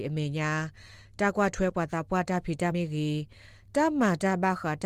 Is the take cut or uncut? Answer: cut